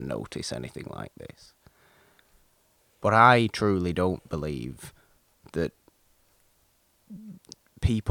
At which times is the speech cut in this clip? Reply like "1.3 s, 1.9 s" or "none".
none